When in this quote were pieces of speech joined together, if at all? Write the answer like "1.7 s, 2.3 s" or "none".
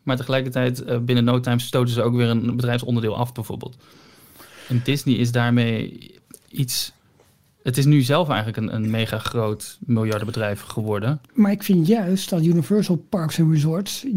8.7 s, 11.3 s